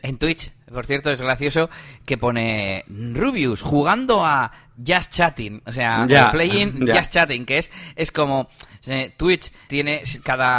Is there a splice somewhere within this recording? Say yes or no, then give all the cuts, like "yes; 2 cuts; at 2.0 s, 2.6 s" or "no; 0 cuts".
yes; 1 cut; at 9.7 s